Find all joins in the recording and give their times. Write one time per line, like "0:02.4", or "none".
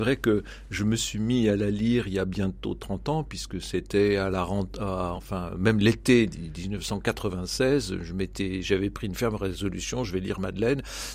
0:05.2